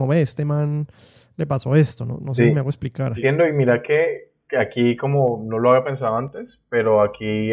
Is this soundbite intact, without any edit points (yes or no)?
no